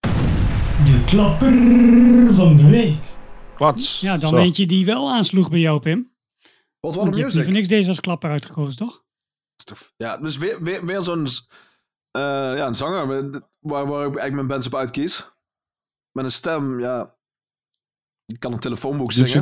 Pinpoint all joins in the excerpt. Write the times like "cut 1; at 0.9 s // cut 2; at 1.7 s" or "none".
none